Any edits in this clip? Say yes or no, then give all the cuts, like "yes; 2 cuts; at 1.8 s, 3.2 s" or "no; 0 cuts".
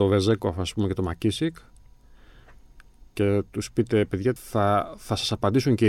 yes; 1 cut; at 4.4 s